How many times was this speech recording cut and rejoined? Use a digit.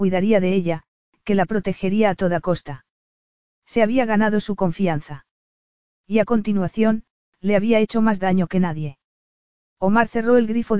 0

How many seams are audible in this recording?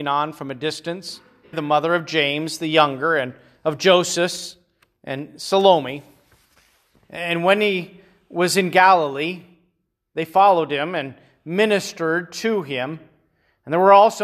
1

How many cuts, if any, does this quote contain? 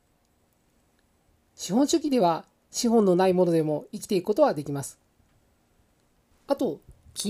1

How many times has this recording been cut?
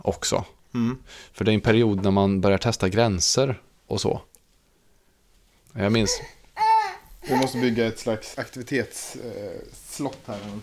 2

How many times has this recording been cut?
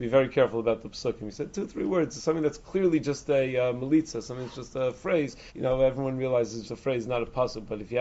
2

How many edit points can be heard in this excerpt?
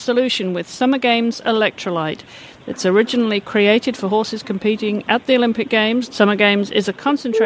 1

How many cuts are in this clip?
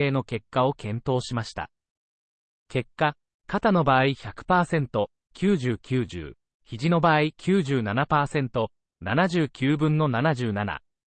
0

